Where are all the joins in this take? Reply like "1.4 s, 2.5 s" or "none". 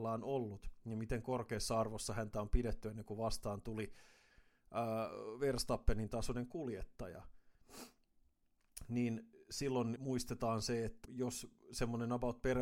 10.0 s, 11.0 s